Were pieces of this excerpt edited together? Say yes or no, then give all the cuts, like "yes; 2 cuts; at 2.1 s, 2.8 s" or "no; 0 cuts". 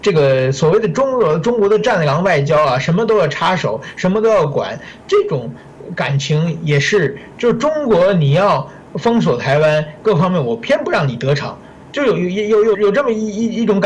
yes; 1 cut; at 12.7 s